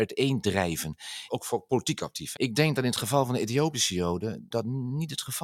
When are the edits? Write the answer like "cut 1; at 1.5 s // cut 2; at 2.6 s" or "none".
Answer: cut 1; at 1.3 s // cut 2; at 2.4 s // cut 3; at 4.5 s